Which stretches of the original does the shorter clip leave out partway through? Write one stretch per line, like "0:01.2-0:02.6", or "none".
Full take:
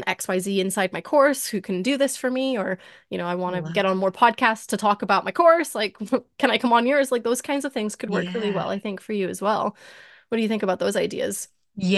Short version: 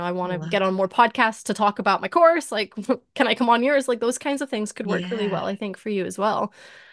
none